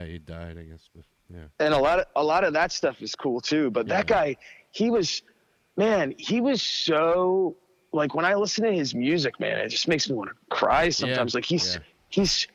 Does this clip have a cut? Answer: no; 0 cuts

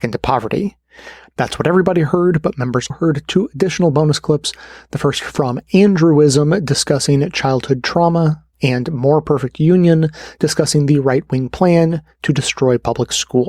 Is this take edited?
yes; 2 cuts; at 2.9 s, 8.5 s

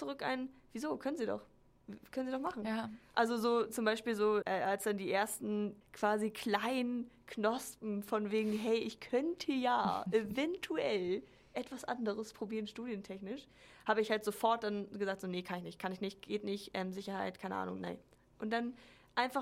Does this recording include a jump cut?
no; 0 cuts

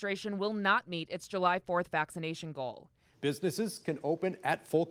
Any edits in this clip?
yes; 1 cut; at 3.1 s

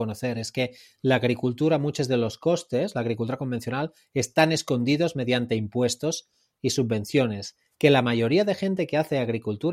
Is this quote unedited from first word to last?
yes; 0 cuts

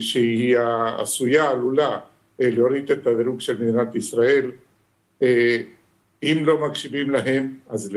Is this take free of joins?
yes; 0 cuts

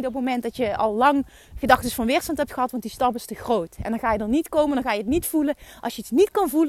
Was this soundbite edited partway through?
no; 0 cuts

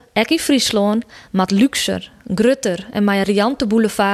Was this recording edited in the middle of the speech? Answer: no; 0 cuts

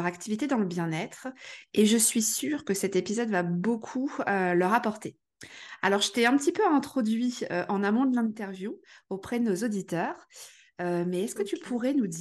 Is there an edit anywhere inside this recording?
no; 0 cuts

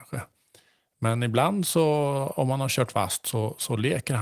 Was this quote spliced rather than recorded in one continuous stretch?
no; 0 cuts

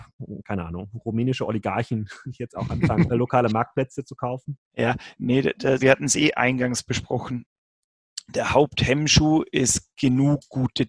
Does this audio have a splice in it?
yes; 3 cuts; at 3.1 s, 4.6 s, 5.8 s

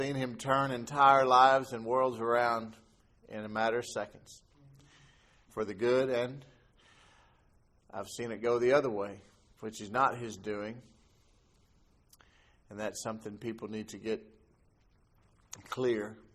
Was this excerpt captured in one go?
yes; 0 cuts

